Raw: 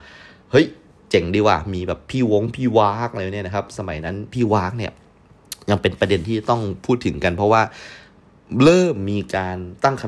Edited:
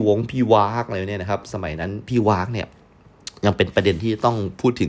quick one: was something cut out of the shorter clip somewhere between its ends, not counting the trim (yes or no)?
no